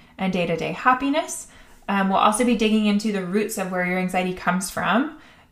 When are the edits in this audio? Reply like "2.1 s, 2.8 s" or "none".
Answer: none